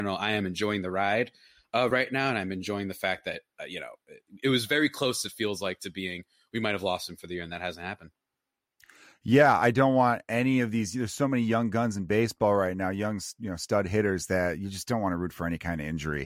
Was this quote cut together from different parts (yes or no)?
no